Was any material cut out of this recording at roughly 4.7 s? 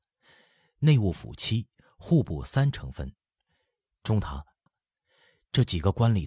yes; 1 cut; at 4.7 s

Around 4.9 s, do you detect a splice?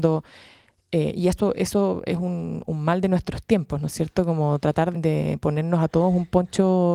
yes; 1 cut; at 4.9 s

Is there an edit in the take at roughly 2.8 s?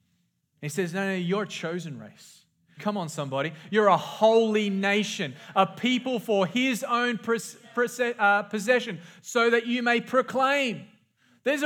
yes; 1 cut; at 2.8 s

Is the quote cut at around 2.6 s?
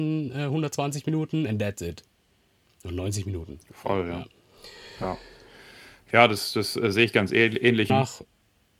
no; 1 cut; at 7.9 s

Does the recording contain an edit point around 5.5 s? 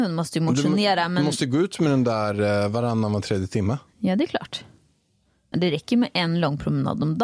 yes; 1 cut; at 5.5 s

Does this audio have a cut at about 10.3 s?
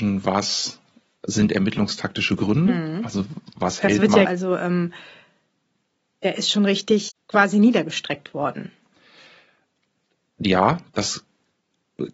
no; 1 cut; at 4.2 s

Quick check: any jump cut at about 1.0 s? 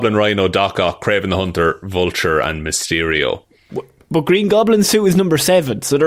no; 0 cuts

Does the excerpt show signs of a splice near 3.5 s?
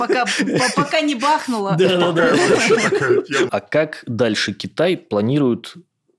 yes; 1 cut; at 3.5 s

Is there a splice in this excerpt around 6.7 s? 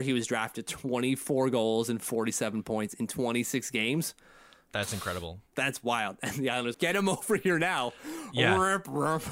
yes; 1 cut; at 6.7 s

